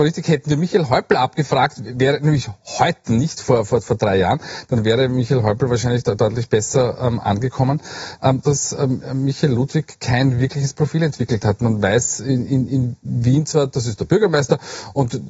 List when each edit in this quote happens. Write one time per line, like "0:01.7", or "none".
0:08.4

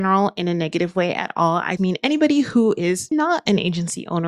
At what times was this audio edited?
0:01.8
0:03.1

